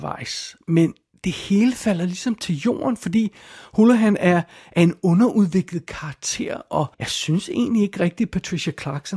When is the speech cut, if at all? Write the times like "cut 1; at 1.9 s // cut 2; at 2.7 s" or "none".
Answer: cut 1; at 6.9 s